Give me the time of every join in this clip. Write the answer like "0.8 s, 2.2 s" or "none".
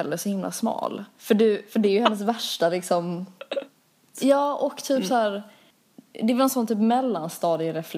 1.2 s, 4.1 s